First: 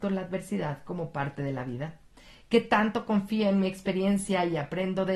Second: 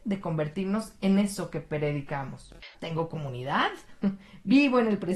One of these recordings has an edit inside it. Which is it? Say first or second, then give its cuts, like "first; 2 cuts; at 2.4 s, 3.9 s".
second; 1 cut; at 2.7 s